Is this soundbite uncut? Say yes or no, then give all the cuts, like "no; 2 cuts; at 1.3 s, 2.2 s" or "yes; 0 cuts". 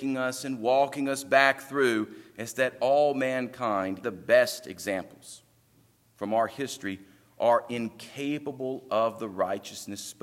no; 1 cut; at 4.0 s